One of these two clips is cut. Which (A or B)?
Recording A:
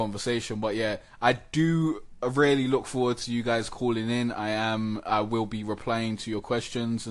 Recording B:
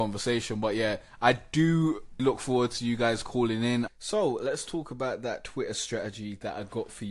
B